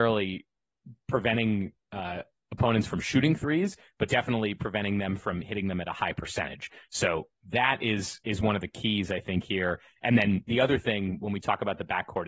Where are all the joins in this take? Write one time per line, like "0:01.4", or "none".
none